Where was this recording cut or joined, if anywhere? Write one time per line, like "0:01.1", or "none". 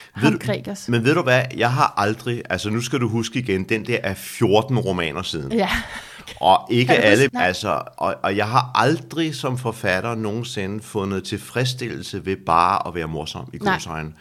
0:07.3